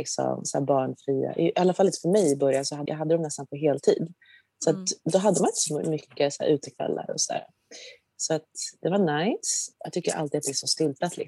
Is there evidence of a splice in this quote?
yes; 2 cuts; at 2.9 s, 9.7 s

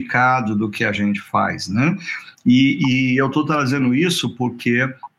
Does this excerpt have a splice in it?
no; 0 cuts

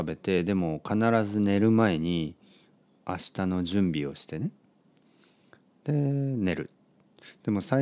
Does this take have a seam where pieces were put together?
no; 0 cuts

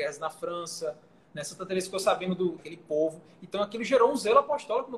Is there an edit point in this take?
yes; 1 cut; at 2.6 s

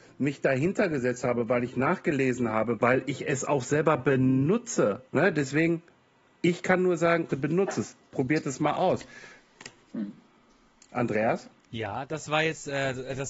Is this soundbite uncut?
no; 3 cuts; at 2.8 s, 5.1 s, 7.3 s

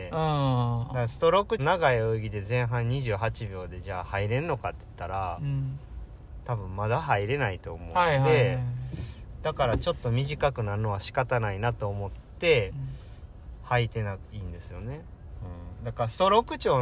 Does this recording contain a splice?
yes; 2 cuts; at 1.6 s, 15.4 s

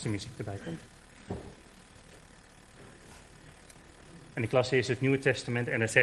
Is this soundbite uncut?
no; 1 cut; at 4.3 s

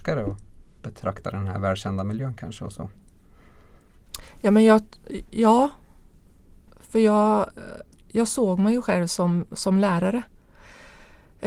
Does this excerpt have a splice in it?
no; 0 cuts

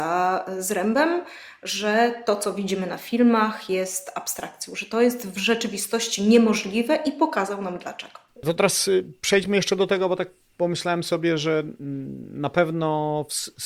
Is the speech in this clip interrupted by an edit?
yes; 1 cut; at 8.4 s

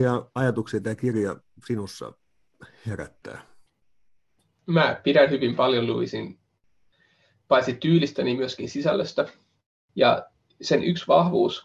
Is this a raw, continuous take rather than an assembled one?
no; 1 cut; at 9.9 s

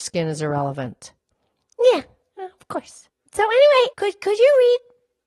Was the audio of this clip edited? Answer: yes; 1 cut; at 3.9 s

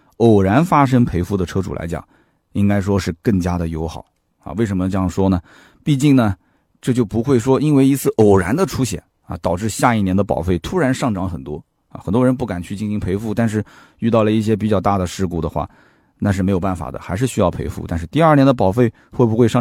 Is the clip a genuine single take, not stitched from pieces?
yes; 0 cuts

